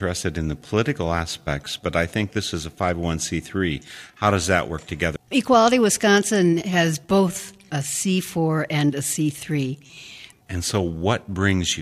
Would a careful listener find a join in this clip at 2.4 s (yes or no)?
no